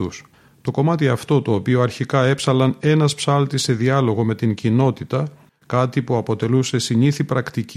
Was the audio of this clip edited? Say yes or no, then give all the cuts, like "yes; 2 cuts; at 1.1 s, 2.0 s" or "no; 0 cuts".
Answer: yes; 1 cut; at 5.5 s